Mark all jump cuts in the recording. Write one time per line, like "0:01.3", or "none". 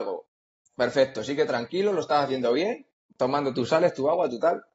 0:03.1